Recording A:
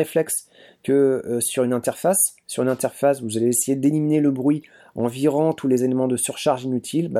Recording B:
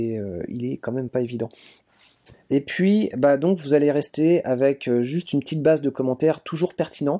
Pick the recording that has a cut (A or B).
B